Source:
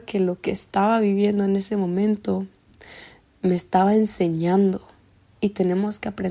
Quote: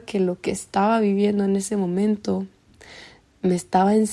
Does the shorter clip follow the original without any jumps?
yes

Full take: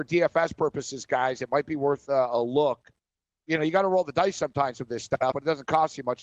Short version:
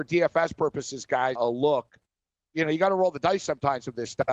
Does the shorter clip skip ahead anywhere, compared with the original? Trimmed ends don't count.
yes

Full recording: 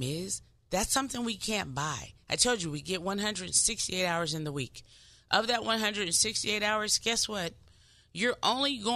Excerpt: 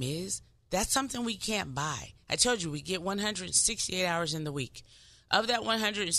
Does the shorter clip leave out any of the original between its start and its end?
no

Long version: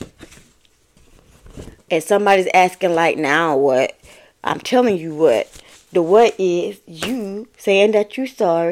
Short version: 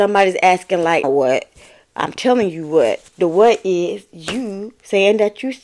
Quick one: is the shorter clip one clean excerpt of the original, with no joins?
no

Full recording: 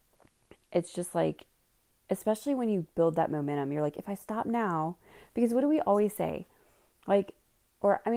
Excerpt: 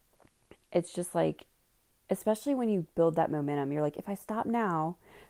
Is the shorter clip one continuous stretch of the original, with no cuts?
yes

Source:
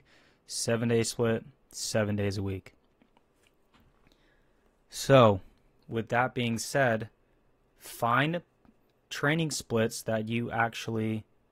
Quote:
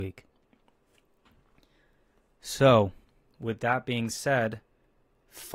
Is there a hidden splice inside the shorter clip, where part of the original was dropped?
no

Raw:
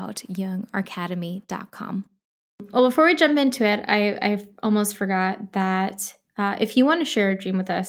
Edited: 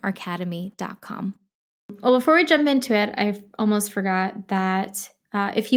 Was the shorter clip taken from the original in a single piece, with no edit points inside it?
no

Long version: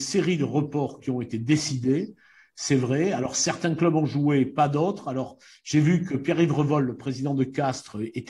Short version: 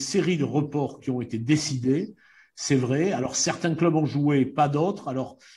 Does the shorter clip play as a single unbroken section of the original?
yes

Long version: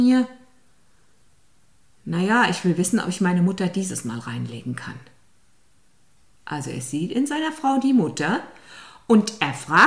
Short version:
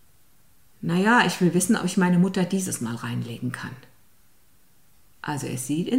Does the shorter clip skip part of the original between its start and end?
no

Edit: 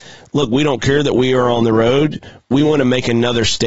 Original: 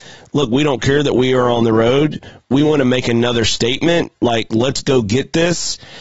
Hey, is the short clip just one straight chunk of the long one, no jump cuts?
yes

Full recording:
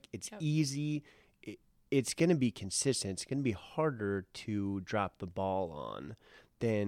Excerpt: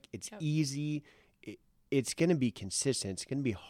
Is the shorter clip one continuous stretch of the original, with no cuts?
yes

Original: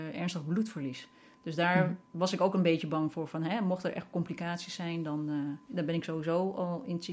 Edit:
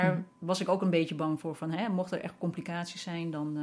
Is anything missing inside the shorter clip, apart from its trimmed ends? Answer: no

